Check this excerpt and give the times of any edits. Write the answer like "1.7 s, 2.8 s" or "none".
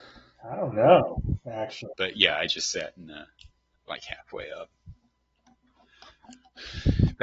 1.9 s